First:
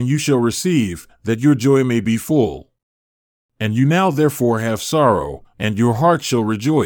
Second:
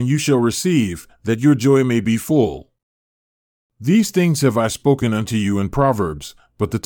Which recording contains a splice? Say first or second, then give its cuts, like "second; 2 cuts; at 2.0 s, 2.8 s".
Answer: first; 2 cuts; at 3.4 s, 5.5 s